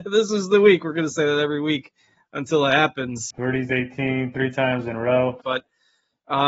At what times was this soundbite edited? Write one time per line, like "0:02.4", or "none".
0:03.3
0:05.4